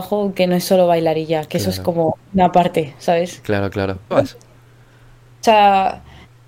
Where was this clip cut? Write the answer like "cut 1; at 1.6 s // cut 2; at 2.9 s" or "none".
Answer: cut 1; at 4.1 s